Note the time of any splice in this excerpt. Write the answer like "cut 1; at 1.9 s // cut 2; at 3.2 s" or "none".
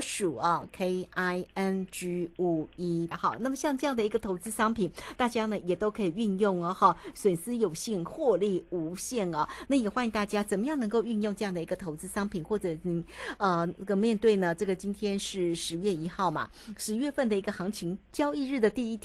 cut 1; at 3.1 s